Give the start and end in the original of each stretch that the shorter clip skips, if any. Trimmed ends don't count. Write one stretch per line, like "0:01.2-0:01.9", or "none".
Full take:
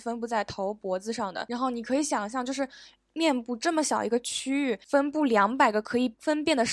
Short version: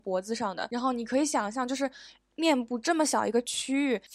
none

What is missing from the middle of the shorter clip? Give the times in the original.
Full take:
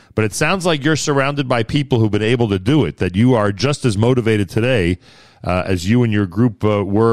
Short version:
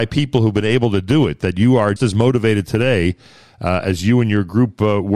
0:03.5-0:03.8

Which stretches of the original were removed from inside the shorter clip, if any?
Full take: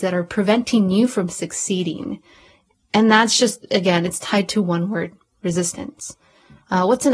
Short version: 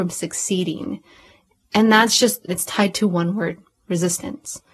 0:03.7-0:04.0

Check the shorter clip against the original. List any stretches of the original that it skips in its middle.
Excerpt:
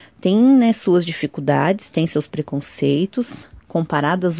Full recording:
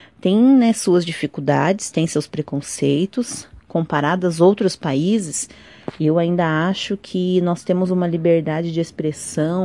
none

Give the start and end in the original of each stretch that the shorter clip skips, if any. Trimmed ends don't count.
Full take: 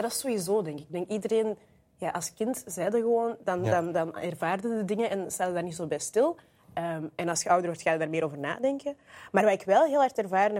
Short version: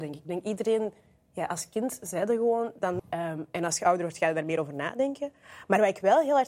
0:03.6-0:06.6

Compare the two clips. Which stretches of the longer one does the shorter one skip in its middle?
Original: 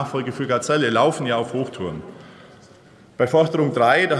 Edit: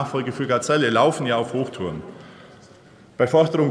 none

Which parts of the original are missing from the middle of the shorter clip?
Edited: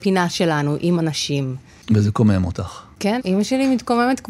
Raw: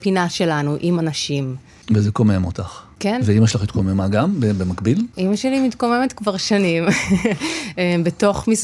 0:03.2-0:05.1

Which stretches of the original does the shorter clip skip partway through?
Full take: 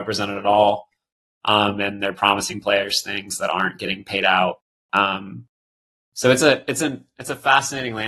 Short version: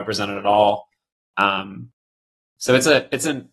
0:01.2-0:04.7

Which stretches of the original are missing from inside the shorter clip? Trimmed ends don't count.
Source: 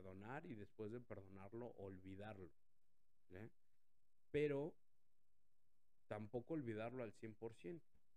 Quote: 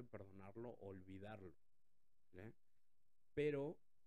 none

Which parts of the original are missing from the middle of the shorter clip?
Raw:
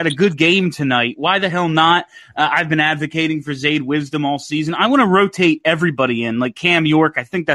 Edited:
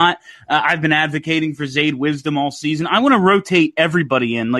none

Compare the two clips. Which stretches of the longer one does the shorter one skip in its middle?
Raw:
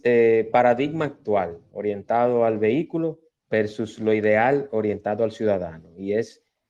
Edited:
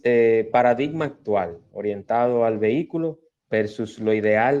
none

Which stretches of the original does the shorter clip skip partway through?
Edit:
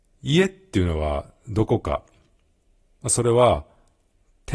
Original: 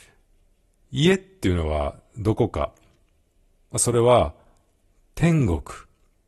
none

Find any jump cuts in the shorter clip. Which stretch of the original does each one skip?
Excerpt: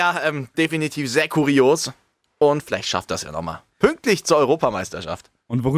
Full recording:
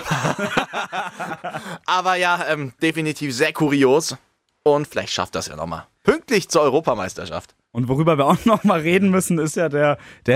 none

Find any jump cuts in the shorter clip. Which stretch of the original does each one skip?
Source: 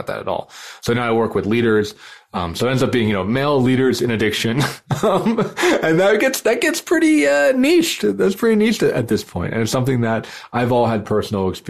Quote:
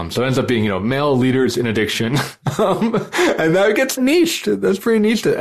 0:06.4-0:07.5

